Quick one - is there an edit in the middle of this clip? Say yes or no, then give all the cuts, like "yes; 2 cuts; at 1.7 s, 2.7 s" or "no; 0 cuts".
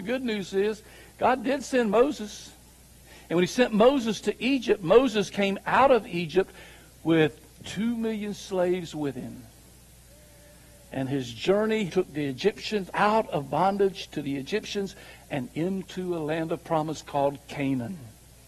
yes; 2 cuts; at 11.9 s, 12.9 s